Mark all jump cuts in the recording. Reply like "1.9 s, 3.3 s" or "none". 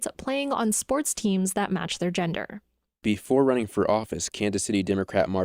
none